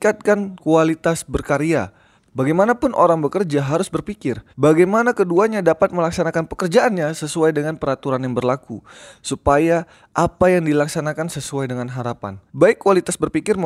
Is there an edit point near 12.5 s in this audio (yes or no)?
yes